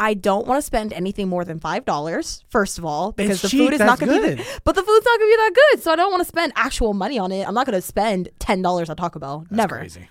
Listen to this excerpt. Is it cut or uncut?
uncut